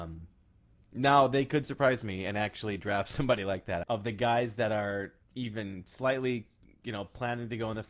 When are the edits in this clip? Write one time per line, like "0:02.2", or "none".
0:03.8
0:05.2